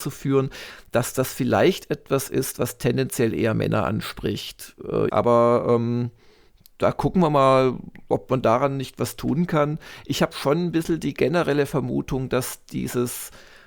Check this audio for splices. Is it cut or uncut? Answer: cut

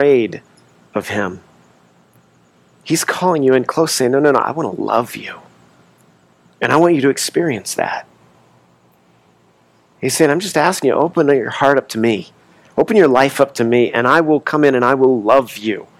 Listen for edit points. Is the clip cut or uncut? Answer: uncut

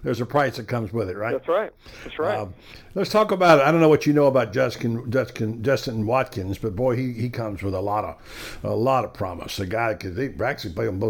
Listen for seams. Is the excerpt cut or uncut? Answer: uncut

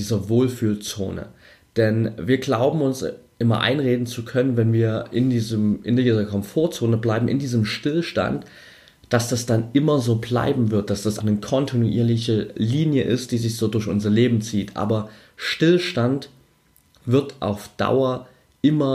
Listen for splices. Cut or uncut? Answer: cut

